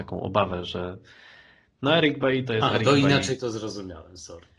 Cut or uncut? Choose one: uncut